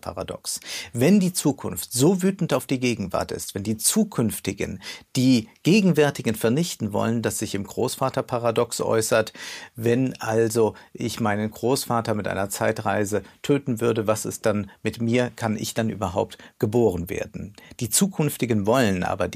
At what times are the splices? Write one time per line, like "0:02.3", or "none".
0:07.2